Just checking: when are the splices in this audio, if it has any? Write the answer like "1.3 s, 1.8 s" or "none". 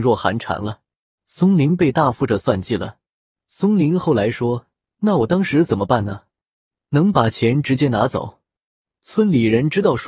1.2 s